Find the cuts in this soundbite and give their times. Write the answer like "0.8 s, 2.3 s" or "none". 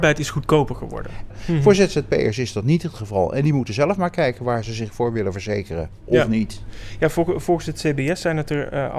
1.3 s